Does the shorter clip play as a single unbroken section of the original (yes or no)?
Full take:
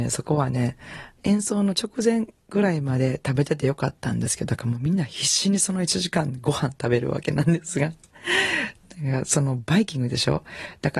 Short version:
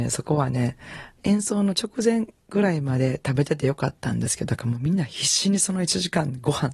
yes